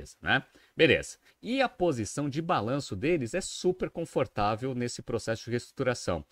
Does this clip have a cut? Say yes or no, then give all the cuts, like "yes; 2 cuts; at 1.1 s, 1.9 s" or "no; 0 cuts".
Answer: yes; 1 cut; at 1.3 s